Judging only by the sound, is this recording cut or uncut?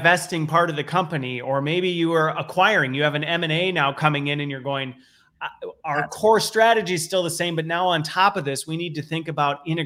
uncut